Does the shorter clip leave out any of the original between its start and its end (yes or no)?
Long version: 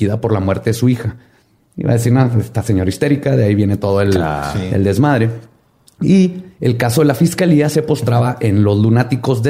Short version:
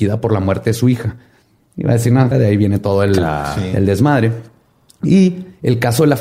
yes